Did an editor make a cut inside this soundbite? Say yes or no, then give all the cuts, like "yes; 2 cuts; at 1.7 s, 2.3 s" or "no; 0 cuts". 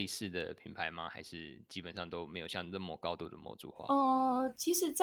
no; 0 cuts